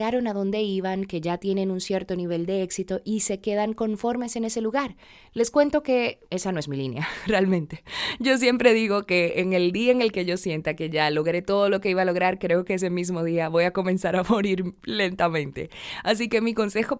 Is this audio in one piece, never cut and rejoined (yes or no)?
no